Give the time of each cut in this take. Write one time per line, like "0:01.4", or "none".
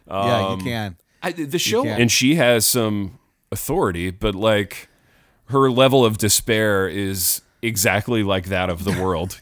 0:01.9